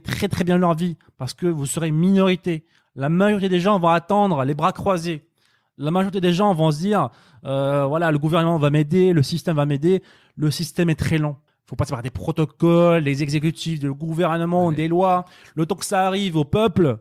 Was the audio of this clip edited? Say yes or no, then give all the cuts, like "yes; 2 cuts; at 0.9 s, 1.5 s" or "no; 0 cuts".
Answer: yes; 1 cut; at 11.5 s